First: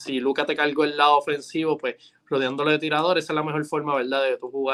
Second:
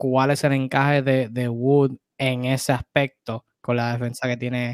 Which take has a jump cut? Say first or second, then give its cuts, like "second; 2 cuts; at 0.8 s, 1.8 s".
second; 1 cut; at 3.5 s